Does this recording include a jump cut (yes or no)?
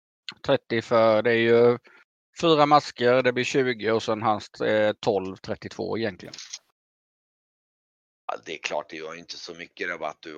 no